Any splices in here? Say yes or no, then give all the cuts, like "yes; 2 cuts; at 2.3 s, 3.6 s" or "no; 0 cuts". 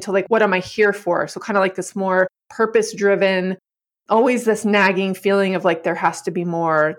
no; 0 cuts